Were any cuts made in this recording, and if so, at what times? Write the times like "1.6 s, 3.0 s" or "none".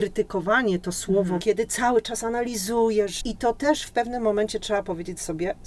1.4 s, 3.2 s